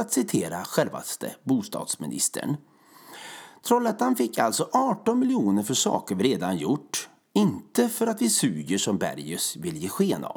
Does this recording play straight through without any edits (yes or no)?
yes